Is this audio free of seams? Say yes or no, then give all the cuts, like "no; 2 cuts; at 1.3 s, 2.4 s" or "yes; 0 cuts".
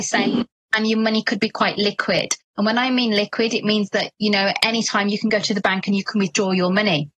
yes; 0 cuts